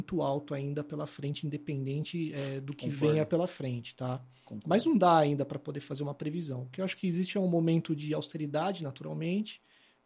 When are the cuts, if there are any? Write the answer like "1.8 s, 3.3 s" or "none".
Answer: none